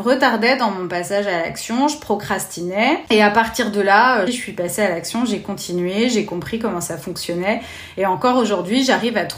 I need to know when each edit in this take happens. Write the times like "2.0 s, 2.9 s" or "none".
3.1 s, 4.3 s